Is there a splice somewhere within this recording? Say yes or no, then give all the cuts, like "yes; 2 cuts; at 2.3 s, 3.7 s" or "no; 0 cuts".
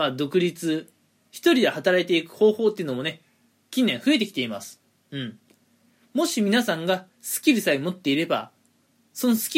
no; 0 cuts